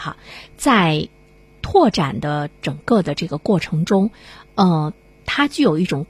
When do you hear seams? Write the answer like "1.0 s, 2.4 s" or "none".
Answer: none